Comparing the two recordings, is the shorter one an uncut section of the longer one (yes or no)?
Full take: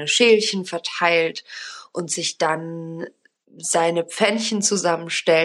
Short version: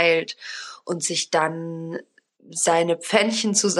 yes